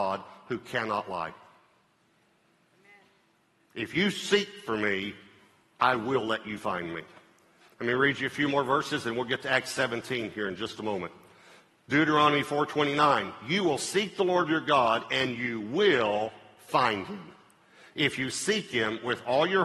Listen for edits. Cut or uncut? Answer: uncut